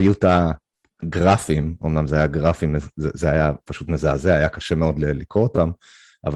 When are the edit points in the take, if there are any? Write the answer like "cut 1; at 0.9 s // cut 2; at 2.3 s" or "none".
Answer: none